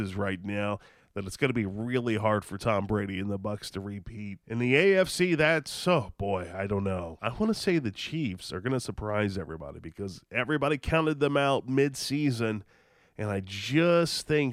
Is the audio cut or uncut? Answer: cut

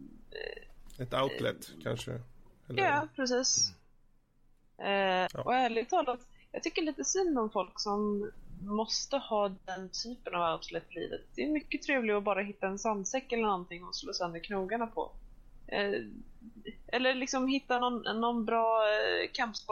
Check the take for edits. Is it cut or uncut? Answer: cut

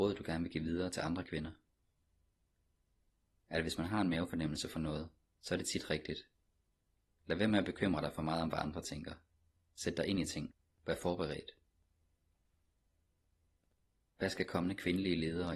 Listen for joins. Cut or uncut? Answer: uncut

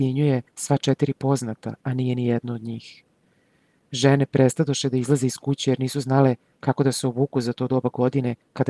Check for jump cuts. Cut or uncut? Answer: uncut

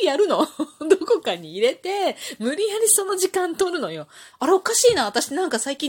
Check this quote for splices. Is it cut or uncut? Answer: cut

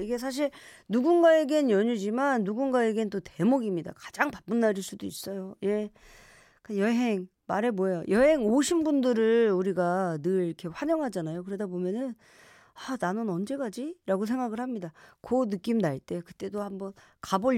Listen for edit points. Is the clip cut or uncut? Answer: uncut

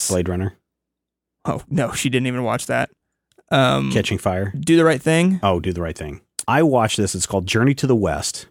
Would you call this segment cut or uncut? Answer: cut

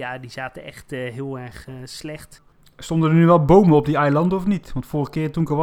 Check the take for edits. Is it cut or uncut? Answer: uncut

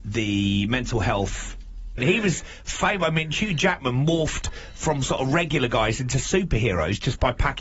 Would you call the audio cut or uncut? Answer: cut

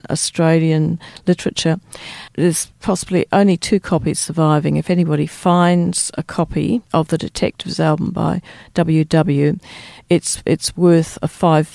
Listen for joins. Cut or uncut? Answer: cut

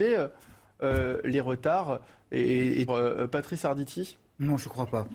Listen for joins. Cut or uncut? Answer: cut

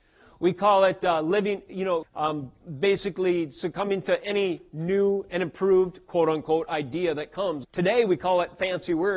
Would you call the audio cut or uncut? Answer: cut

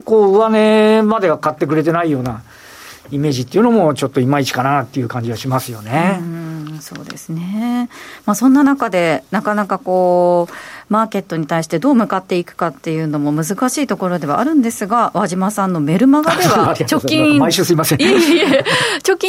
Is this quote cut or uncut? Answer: uncut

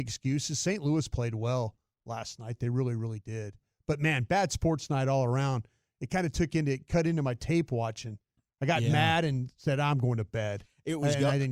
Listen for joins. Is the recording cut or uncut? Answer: uncut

